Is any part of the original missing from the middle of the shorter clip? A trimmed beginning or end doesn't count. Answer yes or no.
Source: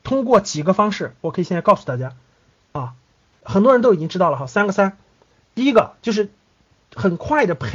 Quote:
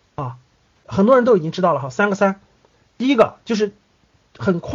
no